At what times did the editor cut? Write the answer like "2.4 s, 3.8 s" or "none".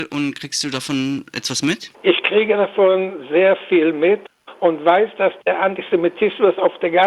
1.9 s